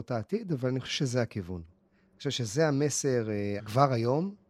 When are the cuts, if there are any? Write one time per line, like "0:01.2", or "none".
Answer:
0:01.7
0:03.6